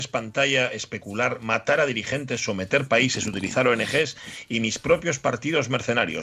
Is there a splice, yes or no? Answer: no